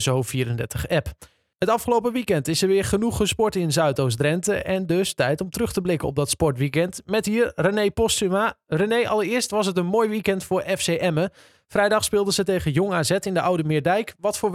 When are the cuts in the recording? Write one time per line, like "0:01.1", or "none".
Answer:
none